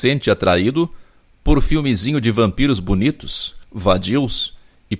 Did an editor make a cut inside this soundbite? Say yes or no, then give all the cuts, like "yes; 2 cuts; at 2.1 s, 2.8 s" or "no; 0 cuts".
yes; 1 cut; at 3.6 s